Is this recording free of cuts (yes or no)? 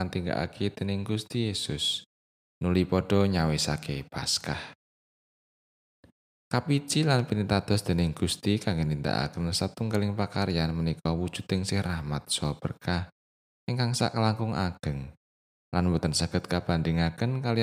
yes